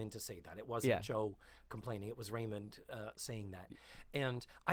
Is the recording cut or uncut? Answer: uncut